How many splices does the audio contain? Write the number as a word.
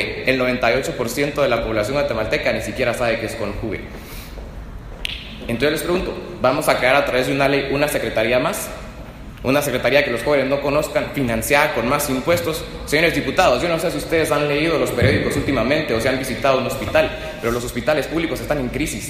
zero